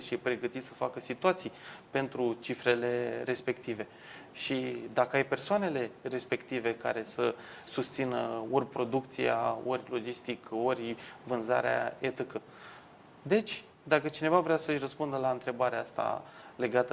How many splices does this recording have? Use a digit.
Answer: 1